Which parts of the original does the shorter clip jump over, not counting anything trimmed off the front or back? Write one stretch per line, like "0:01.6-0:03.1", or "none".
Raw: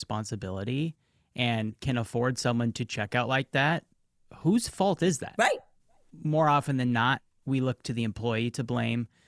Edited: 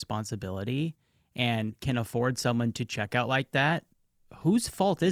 none